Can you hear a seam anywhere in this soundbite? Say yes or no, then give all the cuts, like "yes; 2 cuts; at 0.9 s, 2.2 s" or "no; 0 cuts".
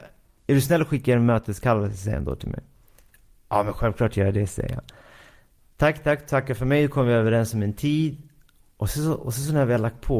no; 0 cuts